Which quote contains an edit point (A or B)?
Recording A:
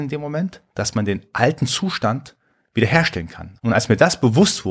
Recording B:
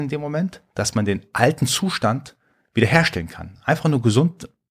A